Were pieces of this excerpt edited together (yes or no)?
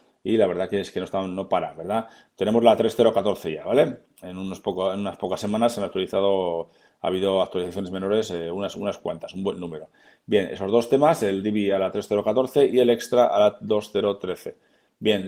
no